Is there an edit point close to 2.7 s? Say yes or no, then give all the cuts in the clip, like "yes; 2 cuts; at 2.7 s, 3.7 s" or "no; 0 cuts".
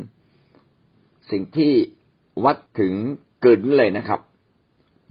yes; 1 cut; at 2.7 s